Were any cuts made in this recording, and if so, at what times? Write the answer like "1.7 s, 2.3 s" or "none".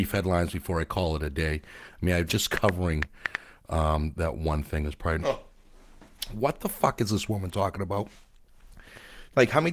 2.3 s, 5.2 s